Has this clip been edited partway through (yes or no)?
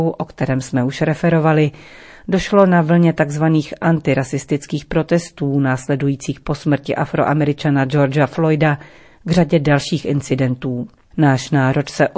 yes